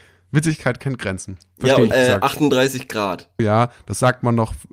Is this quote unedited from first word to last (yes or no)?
no